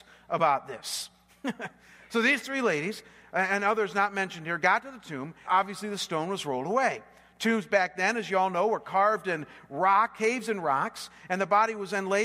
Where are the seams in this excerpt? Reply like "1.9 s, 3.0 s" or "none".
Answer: 5.5 s